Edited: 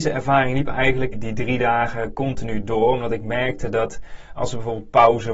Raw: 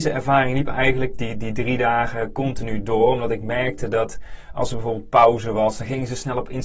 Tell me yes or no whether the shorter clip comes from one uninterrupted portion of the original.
no